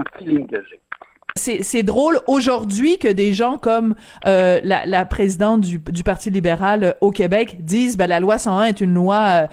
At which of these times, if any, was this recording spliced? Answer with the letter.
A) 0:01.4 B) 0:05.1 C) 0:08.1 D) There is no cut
A